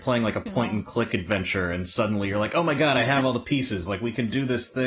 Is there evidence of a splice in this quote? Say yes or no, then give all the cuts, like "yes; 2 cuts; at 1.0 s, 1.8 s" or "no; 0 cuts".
no; 0 cuts